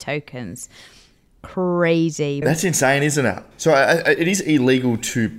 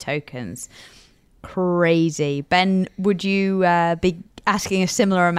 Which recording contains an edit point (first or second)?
first